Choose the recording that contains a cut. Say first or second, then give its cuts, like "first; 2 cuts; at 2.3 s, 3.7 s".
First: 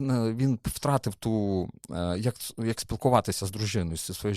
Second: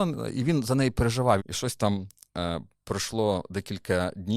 second; 1 cut; at 1.4 s